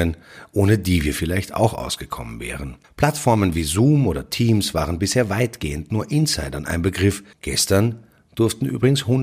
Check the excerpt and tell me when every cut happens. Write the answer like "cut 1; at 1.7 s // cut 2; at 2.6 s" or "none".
cut 1; at 2.8 s // cut 2; at 7.3 s